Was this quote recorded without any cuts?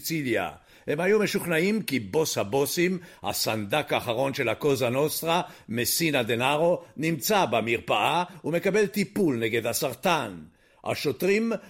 yes; 0 cuts

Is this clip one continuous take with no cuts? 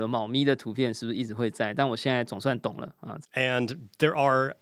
no; 1 cut; at 3.2 s

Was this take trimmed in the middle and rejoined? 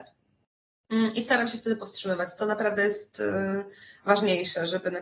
no; 0 cuts

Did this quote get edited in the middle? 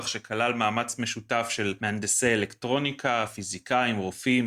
no; 0 cuts

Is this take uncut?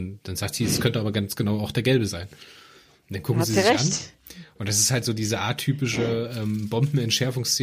yes; 0 cuts

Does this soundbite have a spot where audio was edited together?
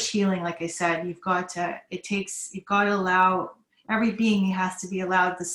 no; 0 cuts

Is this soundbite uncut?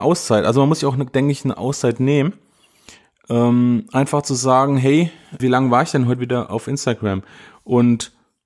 no; 1 cut; at 5.4 s

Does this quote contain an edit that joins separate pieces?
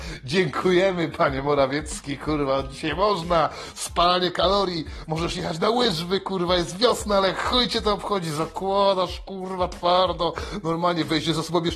no; 0 cuts

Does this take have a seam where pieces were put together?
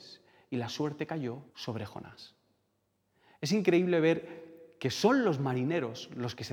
yes; 1 cut; at 1.5 s

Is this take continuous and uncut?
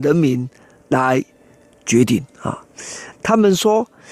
no; 1 cut; at 3.1 s

